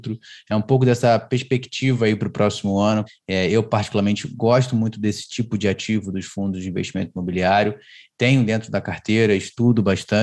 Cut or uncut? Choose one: cut